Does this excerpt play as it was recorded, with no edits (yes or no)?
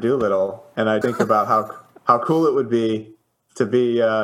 no